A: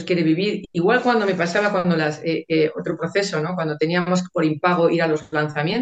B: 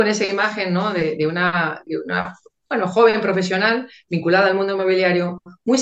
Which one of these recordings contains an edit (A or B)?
B